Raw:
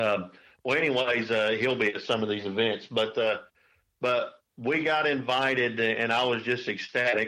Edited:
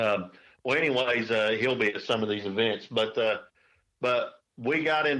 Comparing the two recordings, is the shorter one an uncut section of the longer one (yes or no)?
yes